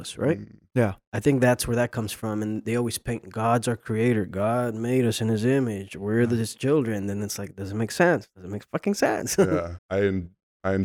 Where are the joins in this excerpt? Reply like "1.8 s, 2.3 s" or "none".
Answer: 9.8 s